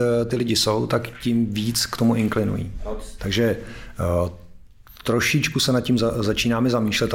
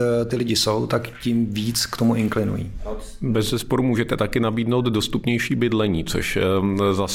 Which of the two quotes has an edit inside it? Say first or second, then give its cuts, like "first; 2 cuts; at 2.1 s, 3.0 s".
first; 1 cut; at 3.2 s